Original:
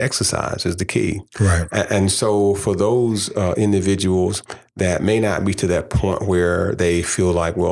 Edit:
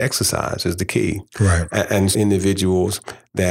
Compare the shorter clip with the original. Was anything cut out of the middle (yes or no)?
yes